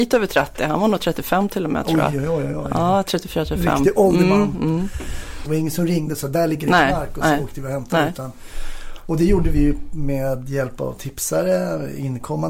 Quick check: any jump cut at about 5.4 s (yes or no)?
yes